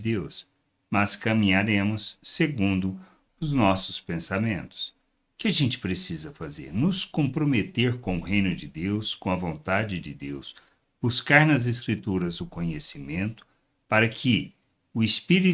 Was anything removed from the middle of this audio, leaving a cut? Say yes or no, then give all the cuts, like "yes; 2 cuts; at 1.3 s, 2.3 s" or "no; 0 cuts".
no; 0 cuts